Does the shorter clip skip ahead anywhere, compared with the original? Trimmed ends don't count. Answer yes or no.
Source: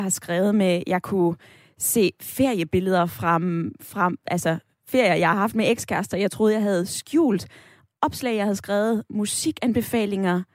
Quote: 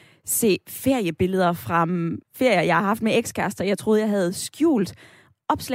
yes